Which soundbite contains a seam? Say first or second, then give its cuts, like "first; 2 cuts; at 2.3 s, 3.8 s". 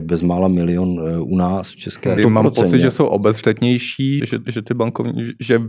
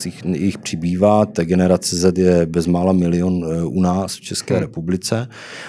first; 2 cuts; at 2.2 s, 4.2 s